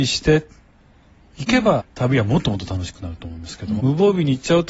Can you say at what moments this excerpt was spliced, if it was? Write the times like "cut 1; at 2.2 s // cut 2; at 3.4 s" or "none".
cut 1; at 1.8 s // cut 2; at 3.8 s